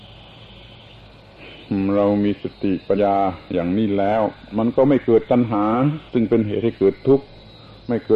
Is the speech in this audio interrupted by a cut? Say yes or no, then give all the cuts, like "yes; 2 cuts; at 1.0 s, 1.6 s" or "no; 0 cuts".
yes; 2 cuts; at 3.0 s, 6.1 s